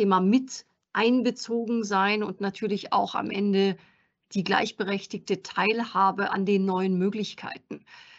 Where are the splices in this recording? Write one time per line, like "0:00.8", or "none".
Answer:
0:06.3